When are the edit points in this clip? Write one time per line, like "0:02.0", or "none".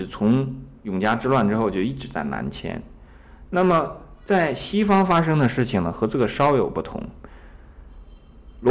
none